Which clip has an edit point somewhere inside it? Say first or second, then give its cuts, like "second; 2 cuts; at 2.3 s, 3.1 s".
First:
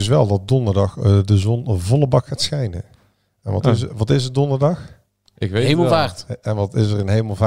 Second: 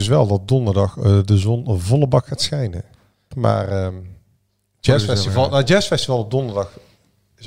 second; 1 cut; at 3.3 s